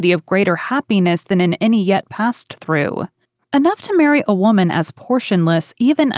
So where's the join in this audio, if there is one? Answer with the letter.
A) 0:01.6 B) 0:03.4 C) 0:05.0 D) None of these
B